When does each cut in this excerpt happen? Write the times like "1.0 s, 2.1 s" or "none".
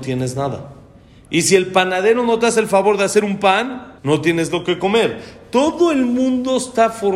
4.0 s